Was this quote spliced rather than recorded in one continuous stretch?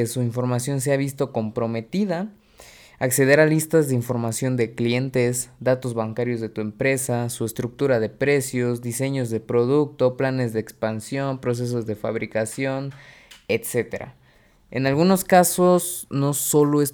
no; 0 cuts

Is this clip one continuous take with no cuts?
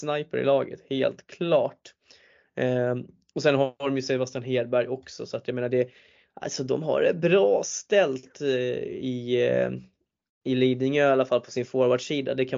yes; 0 cuts

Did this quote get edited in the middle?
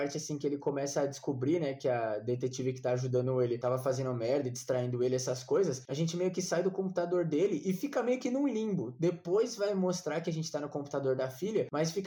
no; 0 cuts

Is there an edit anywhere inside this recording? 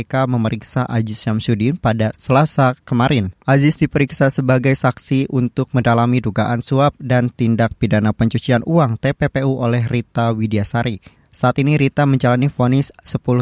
no; 0 cuts

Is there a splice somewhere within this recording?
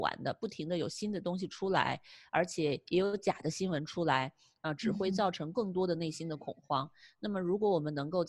no; 0 cuts

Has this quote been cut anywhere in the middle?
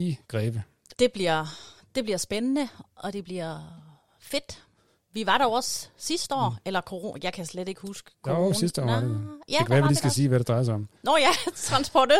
yes; 1 cut; at 0.9 s

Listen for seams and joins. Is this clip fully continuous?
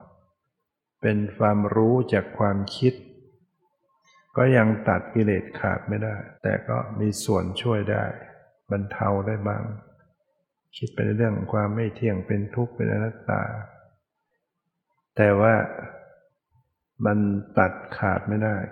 no; 1 cut; at 6.3 s

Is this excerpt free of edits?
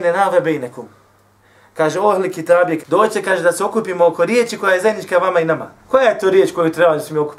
no; 2 cuts; at 2.8 s, 5.8 s

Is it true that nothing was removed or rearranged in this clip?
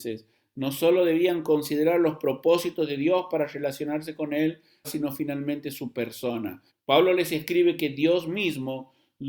no; 2 cuts; at 4.8 s, 6.7 s

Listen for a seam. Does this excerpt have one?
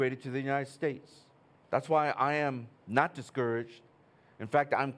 yes; 2 cuts; at 1.6 s, 2.8 s

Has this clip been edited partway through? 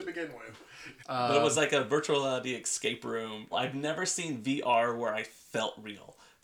yes; 2 cuts; at 1.0 s, 3.5 s

